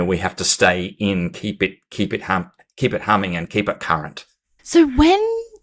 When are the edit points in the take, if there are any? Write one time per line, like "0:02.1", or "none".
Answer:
0:04.6

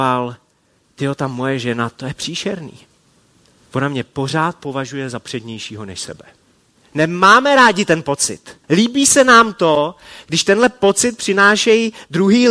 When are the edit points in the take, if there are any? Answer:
0:06.8
0:08.6

